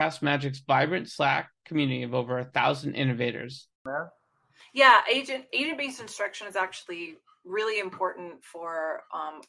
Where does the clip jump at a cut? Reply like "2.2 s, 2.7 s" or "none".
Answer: 3.7 s